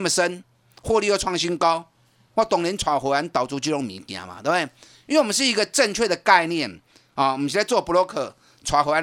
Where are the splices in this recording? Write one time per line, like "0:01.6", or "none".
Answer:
none

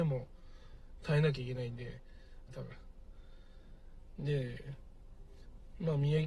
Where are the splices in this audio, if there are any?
0:02.5

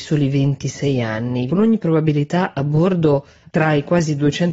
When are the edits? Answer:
0:01.5

